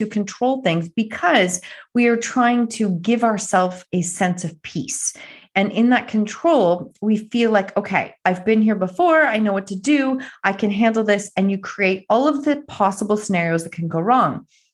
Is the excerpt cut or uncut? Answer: uncut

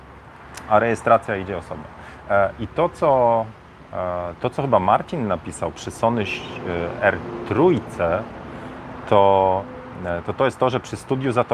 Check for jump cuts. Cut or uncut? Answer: uncut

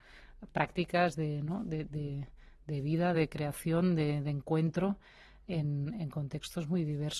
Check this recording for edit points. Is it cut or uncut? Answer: cut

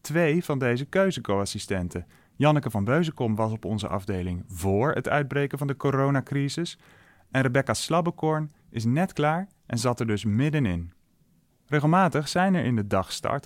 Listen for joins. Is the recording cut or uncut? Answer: cut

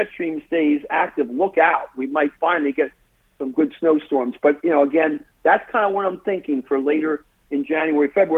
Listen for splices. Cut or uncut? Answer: uncut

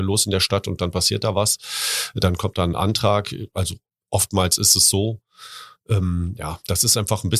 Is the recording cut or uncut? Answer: uncut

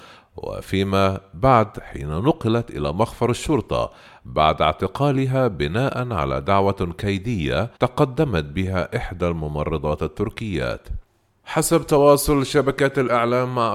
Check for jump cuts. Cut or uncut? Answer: cut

